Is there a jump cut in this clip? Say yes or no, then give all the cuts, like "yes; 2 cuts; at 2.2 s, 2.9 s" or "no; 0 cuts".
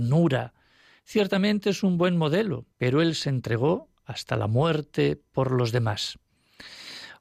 yes; 2 cuts; at 1.0 s, 2.7 s